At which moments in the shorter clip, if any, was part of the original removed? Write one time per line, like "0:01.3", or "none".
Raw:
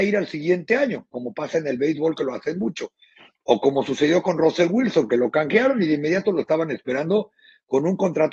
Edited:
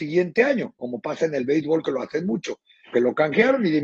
0:02.9